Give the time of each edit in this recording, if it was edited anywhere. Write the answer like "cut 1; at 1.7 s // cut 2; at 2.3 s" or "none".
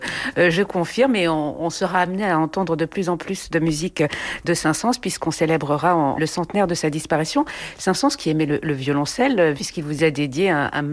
cut 1; at 6.2 s // cut 2; at 9.6 s